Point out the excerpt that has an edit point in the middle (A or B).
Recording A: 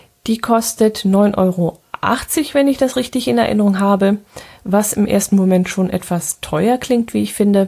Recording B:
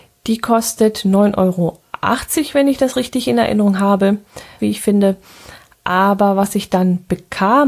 B